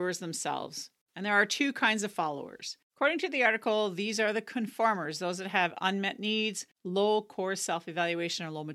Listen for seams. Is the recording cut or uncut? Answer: cut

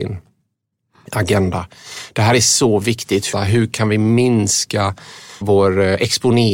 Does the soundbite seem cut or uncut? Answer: cut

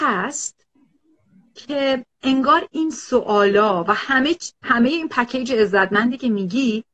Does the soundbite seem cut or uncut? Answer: uncut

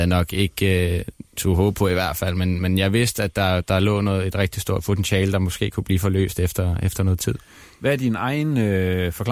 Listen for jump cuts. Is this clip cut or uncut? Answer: uncut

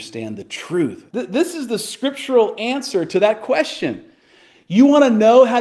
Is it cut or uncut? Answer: cut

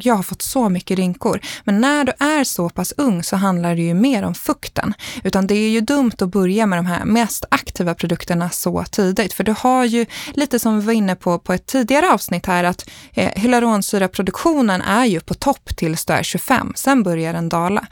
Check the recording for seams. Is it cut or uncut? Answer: uncut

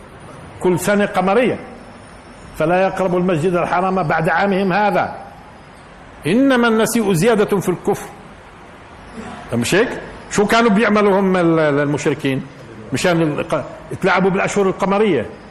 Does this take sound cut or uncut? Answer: uncut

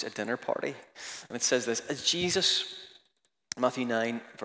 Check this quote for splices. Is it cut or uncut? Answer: uncut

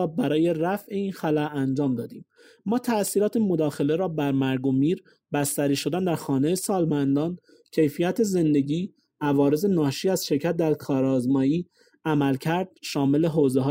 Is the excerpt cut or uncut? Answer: uncut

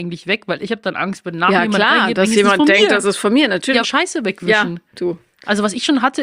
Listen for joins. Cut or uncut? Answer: cut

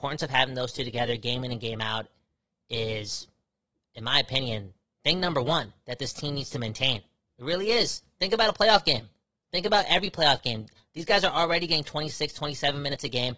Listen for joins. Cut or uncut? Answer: uncut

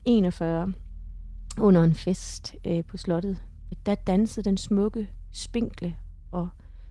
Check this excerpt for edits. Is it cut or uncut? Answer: cut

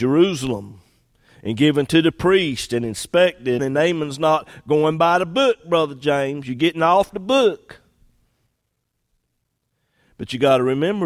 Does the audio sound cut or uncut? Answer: cut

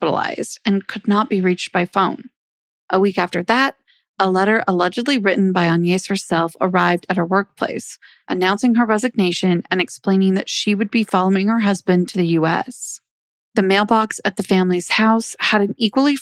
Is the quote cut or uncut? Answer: uncut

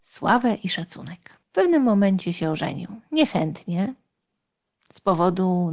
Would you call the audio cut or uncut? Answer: cut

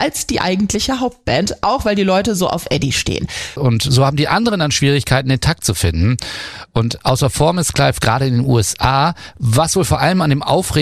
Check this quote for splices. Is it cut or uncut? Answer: cut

